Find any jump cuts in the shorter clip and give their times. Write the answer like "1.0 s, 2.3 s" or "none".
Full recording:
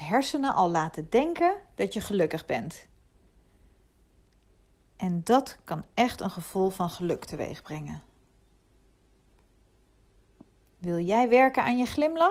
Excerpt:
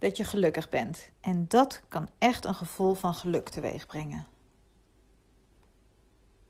1.1 s